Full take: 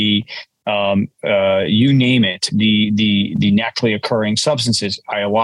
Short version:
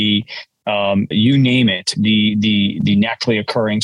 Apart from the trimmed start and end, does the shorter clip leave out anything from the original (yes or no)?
yes